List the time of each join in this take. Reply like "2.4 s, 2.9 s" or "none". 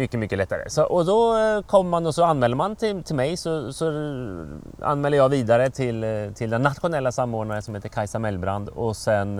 none